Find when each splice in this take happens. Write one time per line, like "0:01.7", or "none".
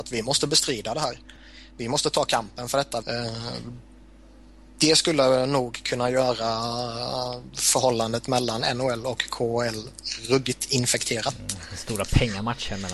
0:03.0